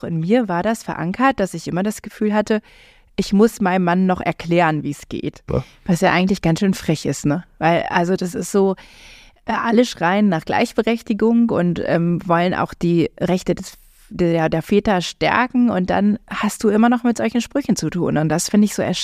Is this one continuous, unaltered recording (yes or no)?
no